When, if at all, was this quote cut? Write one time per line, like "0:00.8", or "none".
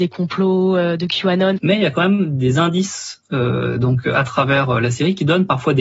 0:01.6